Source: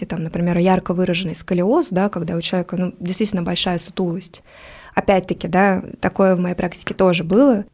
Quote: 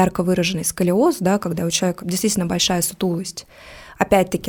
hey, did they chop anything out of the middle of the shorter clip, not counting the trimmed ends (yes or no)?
yes